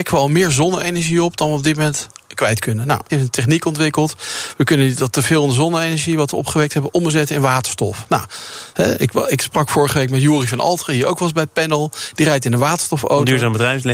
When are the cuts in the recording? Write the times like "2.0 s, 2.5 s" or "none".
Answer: 3.1 s